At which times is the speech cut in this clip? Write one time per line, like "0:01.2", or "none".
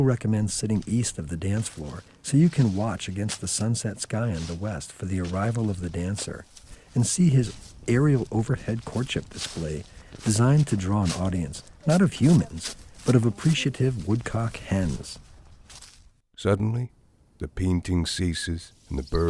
none